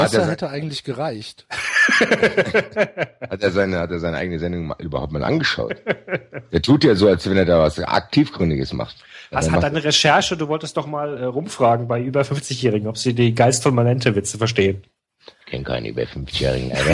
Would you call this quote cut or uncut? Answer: uncut